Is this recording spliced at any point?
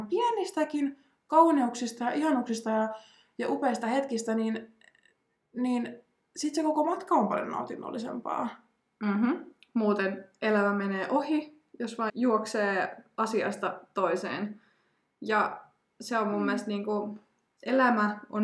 yes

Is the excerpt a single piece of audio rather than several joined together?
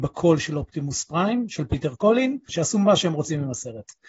no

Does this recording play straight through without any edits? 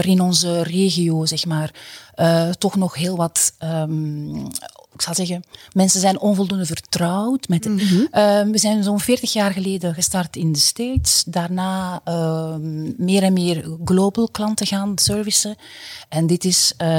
no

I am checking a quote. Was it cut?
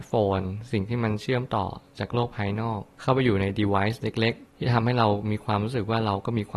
no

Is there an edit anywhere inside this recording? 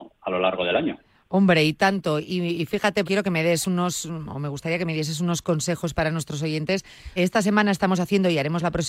yes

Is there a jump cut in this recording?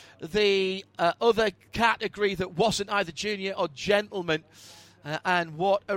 no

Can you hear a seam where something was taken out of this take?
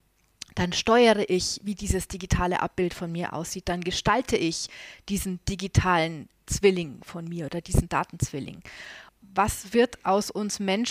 yes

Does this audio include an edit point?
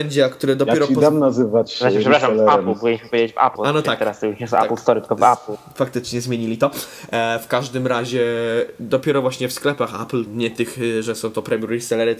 yes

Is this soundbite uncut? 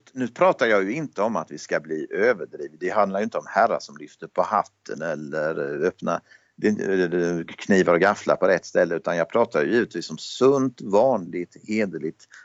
yes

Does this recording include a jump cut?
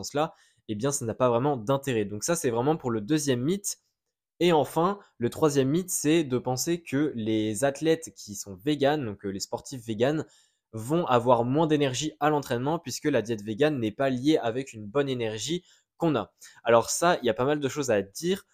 no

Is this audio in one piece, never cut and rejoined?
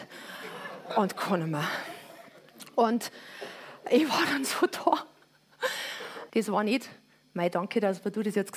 no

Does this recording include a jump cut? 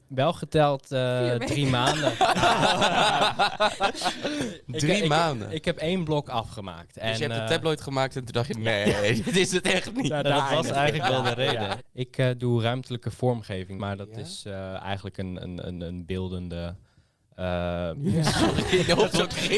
yes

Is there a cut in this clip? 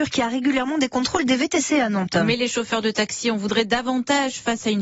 no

